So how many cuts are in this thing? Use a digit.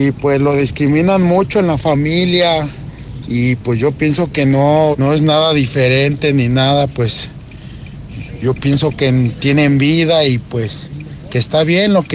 2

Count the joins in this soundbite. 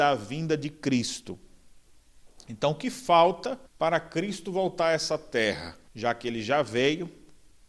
2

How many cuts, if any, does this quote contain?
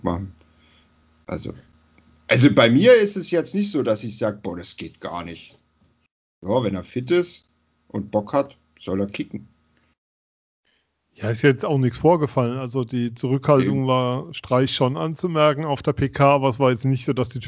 0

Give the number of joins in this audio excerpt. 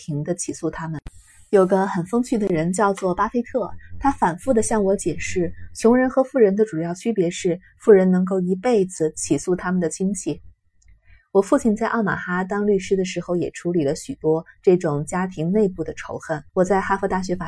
1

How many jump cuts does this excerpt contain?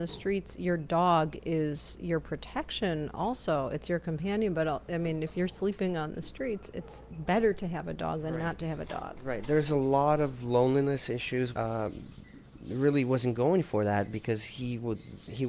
1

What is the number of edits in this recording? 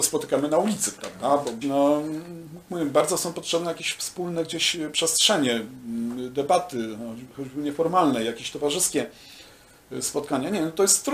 1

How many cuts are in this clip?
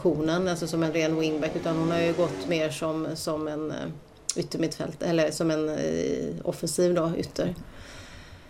0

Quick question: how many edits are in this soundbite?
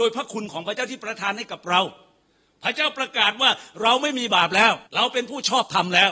1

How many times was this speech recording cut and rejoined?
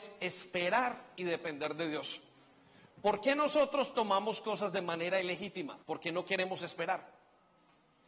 1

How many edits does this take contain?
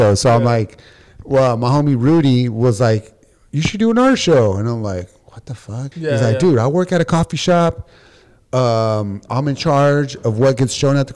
1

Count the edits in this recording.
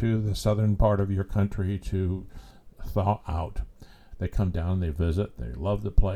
1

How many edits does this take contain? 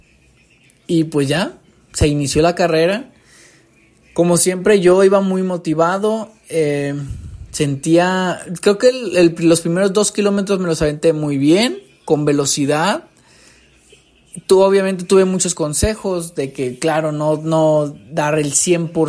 0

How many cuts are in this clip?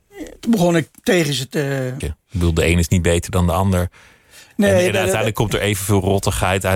1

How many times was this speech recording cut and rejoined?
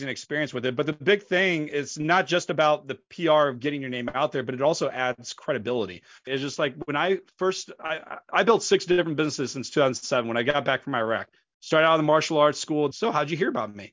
2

